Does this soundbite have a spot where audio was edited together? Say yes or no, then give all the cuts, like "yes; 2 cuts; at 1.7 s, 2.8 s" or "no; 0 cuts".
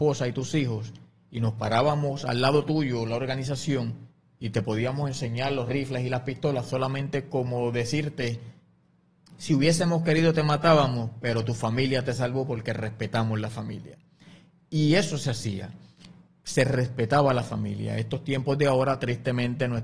no; 0 cuts